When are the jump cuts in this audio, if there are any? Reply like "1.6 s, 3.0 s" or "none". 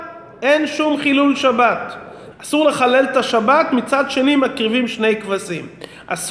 2.3 s